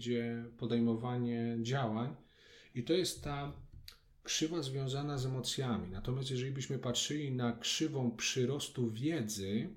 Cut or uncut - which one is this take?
uncut